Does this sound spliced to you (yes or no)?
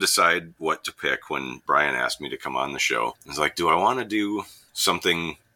no